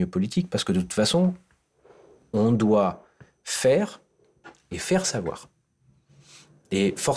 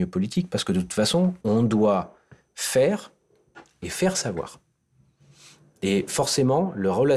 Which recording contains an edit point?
second; 1 cut; at 1.4 s

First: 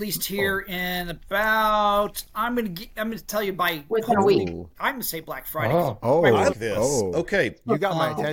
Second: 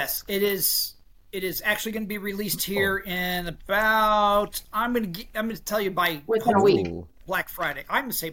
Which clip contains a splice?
first; 2 cuts; at 4.7 s, 6.5 s

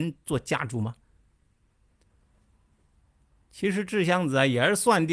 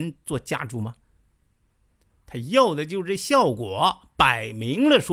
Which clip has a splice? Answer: second; 1 cut; at 2.2 s

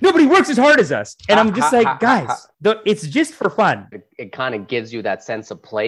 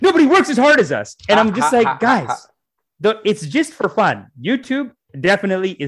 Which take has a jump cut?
first; 2 cuts; at 2.5 s, 3.9 s

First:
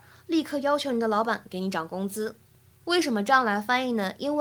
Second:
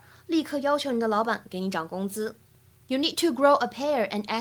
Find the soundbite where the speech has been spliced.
first; 1 cut; at 2.8 s

